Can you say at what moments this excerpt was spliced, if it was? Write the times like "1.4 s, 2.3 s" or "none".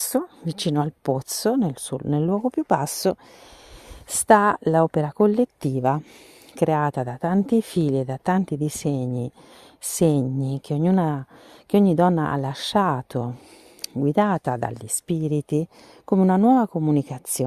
none